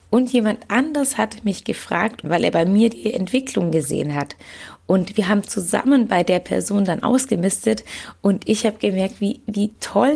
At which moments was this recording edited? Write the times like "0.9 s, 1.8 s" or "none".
2.2 s